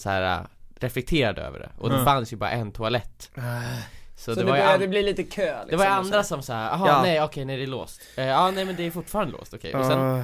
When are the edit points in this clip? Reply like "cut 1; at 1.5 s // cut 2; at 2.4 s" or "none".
none